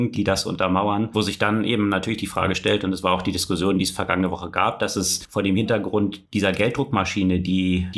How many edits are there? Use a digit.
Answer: 0